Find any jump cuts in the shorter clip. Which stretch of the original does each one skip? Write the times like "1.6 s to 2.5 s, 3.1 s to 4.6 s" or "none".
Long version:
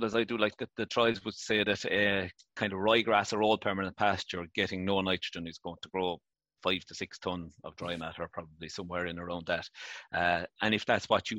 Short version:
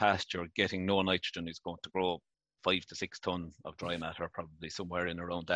none